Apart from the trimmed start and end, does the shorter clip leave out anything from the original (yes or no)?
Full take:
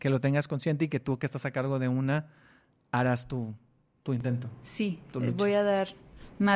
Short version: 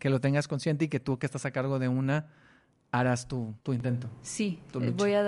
yes